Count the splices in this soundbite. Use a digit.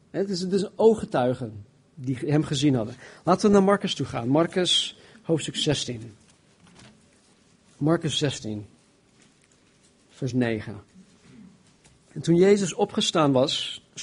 0